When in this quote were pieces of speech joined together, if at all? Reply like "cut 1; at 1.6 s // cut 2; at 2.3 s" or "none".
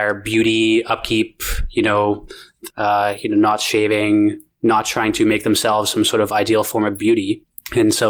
cut 1; at 2.7 s